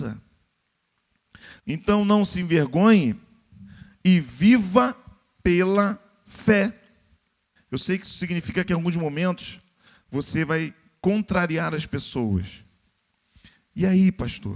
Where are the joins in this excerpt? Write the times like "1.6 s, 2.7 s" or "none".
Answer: 1.6 s, 7.6 s